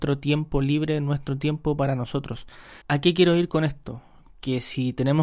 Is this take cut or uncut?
cut